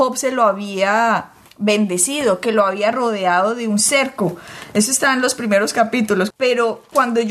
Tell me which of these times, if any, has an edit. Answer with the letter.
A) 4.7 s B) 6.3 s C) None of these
B